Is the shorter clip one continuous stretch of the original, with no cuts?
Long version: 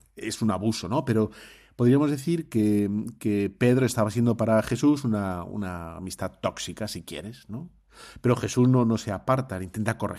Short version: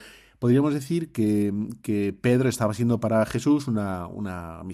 yes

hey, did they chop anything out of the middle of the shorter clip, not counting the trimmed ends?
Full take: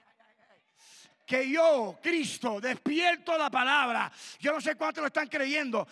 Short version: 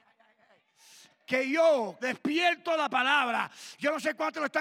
yes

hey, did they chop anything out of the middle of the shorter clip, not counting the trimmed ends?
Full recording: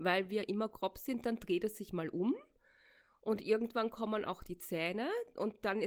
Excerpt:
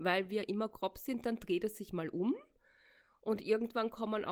no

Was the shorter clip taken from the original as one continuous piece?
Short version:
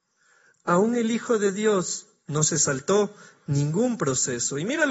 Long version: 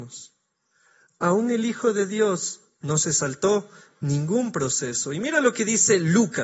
yes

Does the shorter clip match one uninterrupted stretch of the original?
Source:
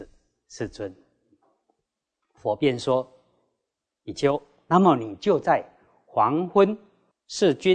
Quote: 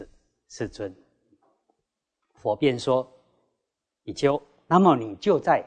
yes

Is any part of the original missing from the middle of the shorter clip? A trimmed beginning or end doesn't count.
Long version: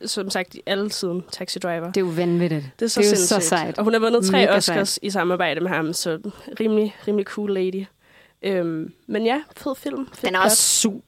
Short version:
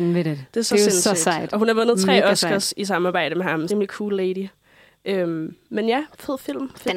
yes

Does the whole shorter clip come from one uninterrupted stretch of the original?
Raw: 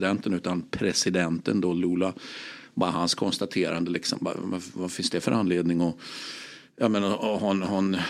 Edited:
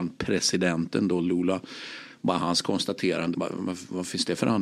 no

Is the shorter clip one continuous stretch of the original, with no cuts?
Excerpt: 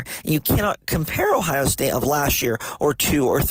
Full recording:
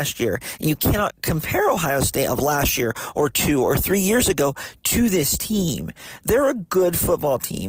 yes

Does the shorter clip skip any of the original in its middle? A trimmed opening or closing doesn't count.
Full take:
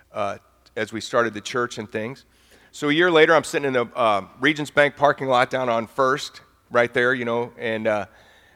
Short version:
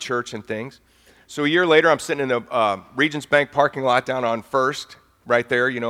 no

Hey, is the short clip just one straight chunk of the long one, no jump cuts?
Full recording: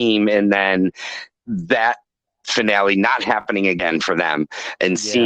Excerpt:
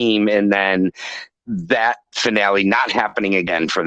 no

